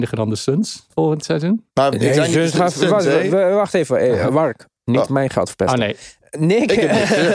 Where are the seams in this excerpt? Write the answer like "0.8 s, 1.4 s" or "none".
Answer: 1.7 s